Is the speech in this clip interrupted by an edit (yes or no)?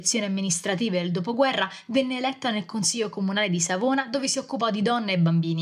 no